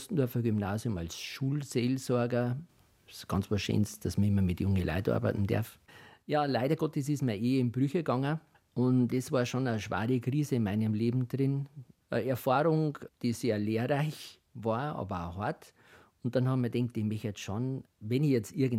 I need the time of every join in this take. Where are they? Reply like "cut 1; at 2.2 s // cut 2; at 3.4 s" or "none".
none